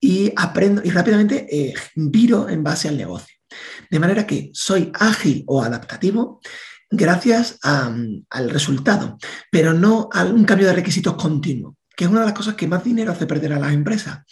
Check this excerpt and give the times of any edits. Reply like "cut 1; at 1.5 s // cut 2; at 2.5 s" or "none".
none